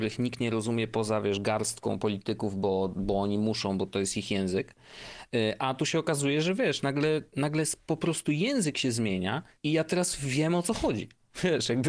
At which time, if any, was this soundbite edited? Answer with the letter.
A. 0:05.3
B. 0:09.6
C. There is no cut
B